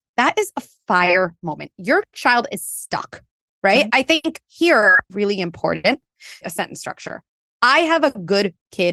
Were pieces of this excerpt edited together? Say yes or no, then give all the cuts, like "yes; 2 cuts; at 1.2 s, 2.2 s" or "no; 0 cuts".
yes; 2 cuts; at 5.1 s, 6.4 s